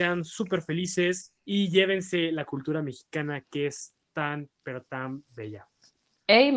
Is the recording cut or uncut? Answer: cut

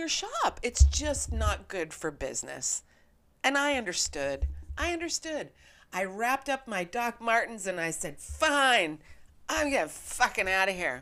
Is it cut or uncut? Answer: uncut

